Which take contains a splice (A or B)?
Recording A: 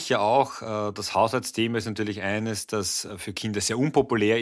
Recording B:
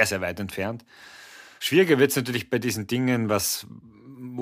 B